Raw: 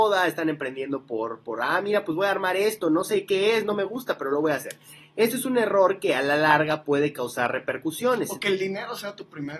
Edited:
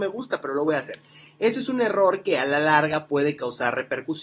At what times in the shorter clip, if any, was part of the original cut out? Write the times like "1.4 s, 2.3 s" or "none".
none